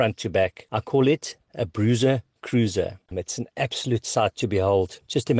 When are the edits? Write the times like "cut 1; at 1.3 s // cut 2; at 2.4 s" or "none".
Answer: cut 1; at 3.1 s

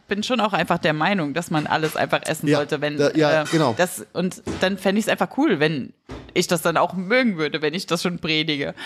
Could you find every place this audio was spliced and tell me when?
cut 1; at 3.5 s

